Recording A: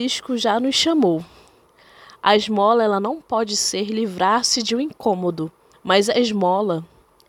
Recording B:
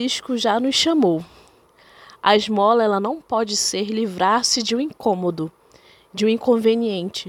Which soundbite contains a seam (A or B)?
A